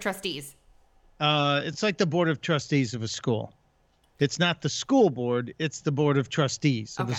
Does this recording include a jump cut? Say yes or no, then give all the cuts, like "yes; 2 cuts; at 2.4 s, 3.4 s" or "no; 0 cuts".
no; 0 cuts